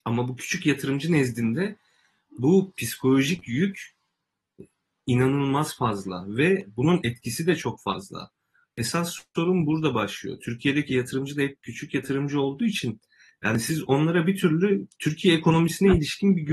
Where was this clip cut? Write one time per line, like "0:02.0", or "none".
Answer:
none